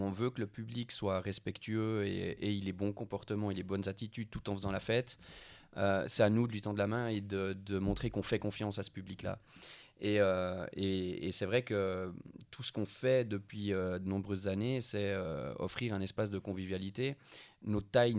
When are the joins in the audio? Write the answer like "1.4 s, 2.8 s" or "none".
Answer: none